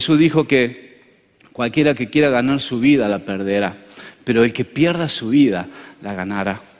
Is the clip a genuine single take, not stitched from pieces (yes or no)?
yes